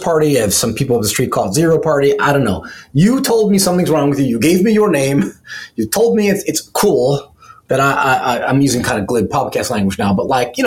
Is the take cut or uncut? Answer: uncut